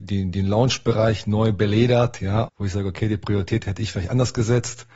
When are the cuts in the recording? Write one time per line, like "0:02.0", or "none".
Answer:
0:02.5